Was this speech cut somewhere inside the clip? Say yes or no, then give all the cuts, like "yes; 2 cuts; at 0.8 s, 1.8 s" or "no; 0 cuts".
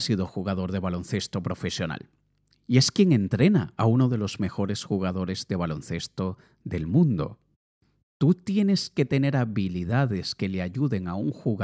no; 0 cuts